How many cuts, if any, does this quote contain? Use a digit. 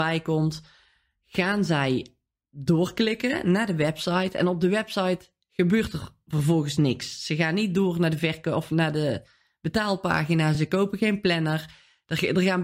0